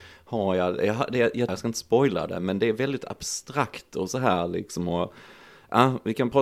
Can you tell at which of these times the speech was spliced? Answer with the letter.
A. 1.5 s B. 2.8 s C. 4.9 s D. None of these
A